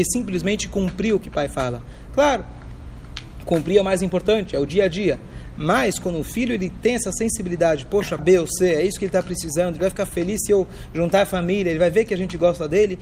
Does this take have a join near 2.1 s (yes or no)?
no